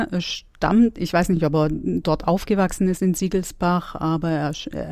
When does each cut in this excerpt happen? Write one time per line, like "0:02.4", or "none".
none